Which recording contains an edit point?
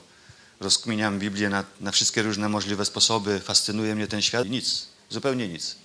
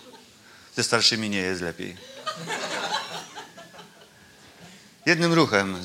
first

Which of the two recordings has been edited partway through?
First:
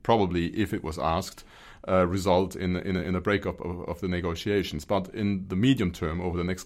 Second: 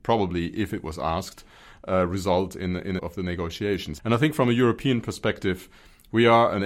second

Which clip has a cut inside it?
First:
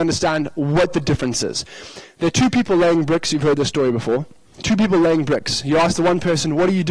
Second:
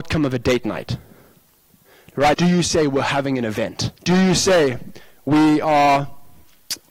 second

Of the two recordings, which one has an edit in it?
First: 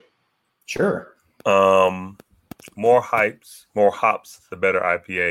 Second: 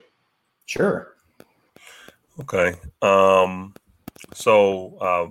first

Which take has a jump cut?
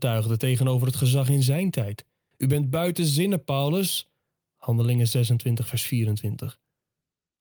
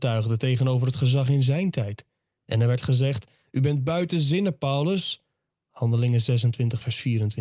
first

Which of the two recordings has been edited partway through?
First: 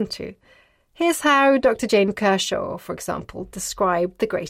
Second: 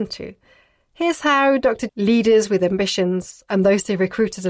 second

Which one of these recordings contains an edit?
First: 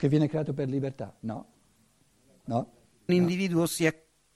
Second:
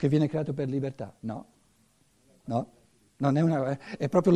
first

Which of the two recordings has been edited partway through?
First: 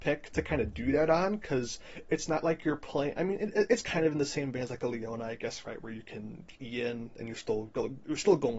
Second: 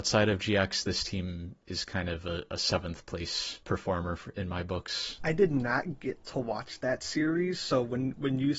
second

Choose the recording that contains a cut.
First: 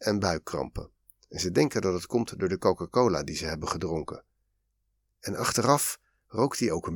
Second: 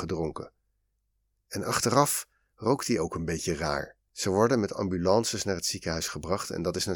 second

